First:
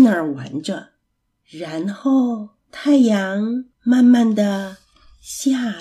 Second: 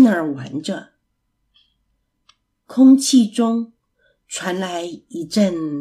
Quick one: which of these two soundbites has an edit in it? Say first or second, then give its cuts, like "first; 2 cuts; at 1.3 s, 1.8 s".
first; 3 cuts; at 1.4 s, 2.6 s, 3.7 s